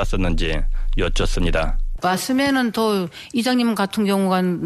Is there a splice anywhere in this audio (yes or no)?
yes